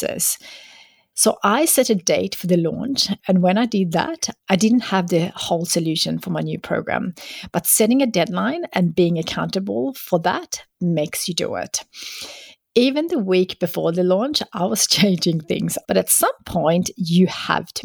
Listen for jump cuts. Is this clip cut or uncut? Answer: cut